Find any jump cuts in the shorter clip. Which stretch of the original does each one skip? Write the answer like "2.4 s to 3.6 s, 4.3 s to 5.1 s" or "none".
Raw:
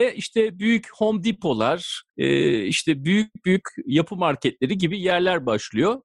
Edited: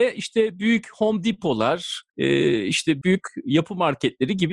3.0 s to 3.4 s